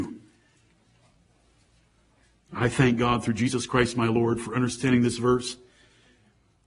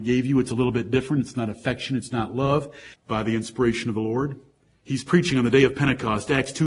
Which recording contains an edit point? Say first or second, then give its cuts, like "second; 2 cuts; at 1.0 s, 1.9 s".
second; 1 cut; at 2.9 s